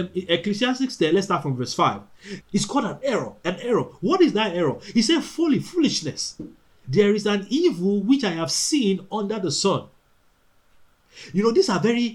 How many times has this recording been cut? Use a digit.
2